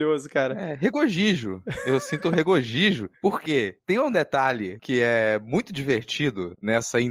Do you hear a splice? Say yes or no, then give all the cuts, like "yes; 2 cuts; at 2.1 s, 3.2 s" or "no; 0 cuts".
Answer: no; 0 cuts